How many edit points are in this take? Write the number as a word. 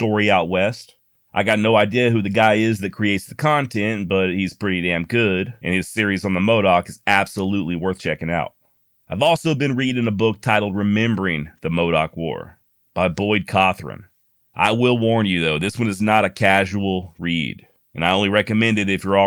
zero